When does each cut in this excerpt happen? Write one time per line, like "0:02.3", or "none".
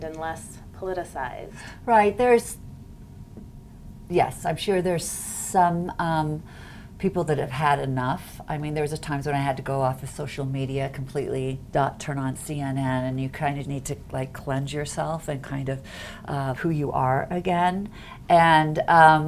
0:13.6
0:16.6